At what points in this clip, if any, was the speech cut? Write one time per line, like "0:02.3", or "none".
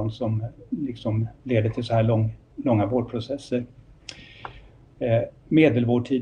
none